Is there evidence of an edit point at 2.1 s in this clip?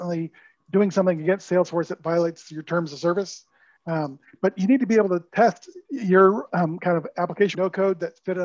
no; 3 cuts; at 3.8 s, 5.8 s, 7.5 s

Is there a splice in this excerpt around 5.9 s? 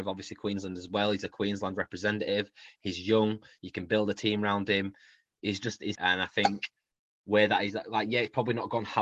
yes; 1 cut; at 5.9 s

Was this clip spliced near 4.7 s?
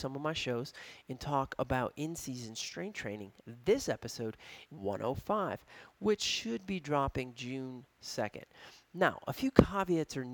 yes; 1 cut; at 4.7 s

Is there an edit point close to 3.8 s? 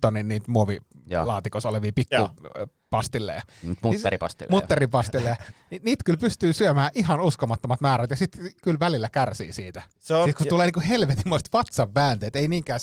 no; 1 cut; at 9.9 s

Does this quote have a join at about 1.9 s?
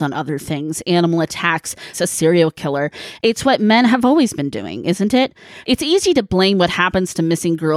yes; 3 cuts; at 1.9 s, 3.2 s, 5.6 s

